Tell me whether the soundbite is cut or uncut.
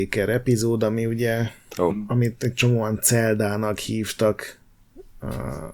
cut